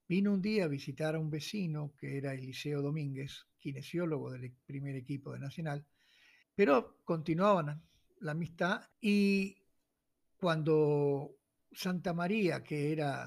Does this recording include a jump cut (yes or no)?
yes